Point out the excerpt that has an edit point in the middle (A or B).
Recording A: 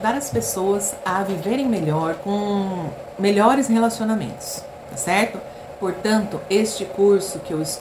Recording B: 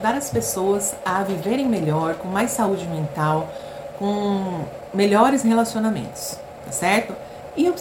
A